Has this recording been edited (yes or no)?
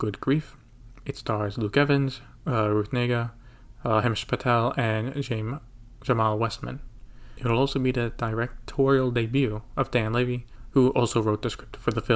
no